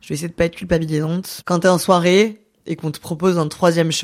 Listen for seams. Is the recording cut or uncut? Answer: cut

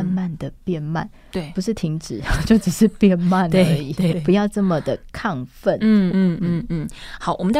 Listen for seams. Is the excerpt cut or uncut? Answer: cut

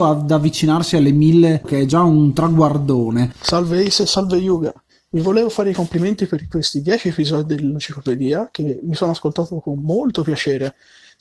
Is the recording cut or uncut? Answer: cut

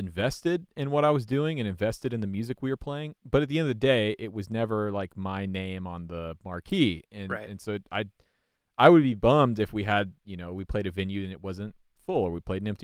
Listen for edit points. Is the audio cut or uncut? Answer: uncut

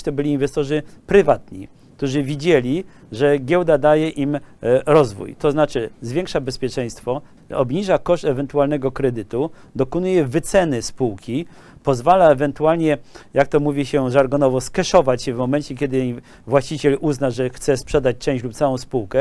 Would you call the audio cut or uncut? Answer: cut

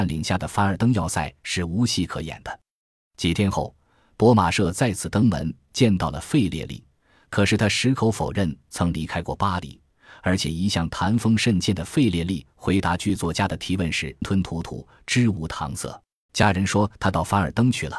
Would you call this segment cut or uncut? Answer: cut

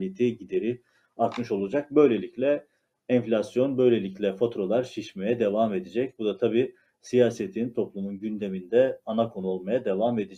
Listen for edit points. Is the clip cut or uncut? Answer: uncut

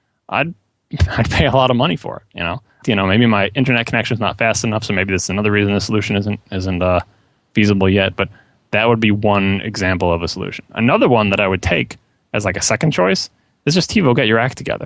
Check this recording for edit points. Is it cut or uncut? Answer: cut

